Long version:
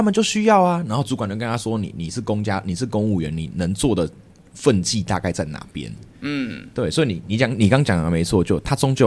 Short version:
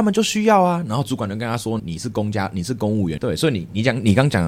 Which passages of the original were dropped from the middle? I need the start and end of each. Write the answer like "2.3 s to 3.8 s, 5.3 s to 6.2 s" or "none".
1.8 s to 1.9 s, 3.3 s to 6.7 s